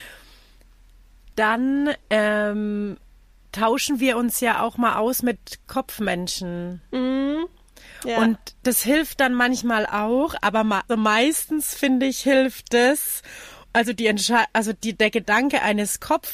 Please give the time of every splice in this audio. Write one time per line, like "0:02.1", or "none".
0:10.9
0:13.6